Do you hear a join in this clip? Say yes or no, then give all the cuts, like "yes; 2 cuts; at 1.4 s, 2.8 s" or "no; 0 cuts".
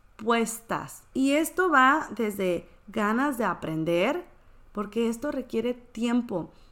yes; 1 cut; at 1.1 s